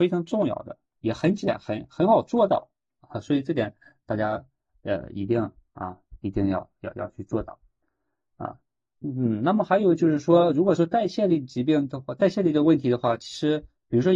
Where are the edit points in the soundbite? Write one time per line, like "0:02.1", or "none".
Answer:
none